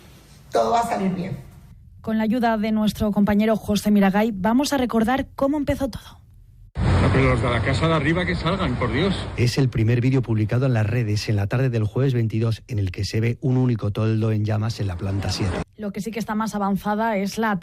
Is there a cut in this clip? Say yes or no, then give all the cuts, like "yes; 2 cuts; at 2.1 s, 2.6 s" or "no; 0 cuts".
yes; 1 cut; at 15.6 s